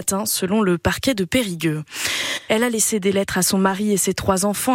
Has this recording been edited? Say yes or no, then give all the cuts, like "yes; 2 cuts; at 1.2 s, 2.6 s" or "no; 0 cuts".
yes; 1 cut; at 2.5 s